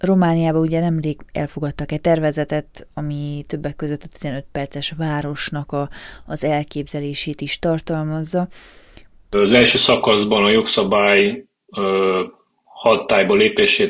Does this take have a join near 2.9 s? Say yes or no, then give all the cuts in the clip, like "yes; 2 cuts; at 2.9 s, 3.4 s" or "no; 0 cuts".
no; 1 cut; at 9.3 s